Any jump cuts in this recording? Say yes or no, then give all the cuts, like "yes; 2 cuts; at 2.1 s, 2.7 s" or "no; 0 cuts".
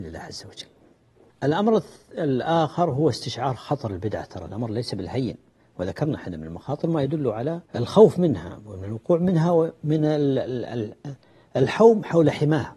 yes; 2 cuts; at 1.3 s, 7.7 s